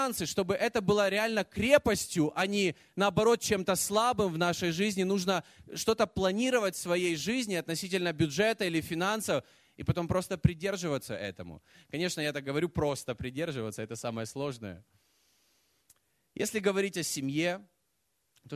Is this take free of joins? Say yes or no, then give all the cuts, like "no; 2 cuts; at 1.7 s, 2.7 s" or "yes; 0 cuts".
yes; 0 cuts